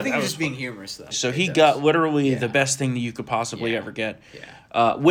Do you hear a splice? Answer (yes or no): yes